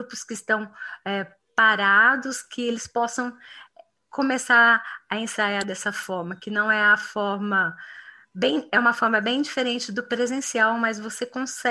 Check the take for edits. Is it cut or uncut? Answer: uncut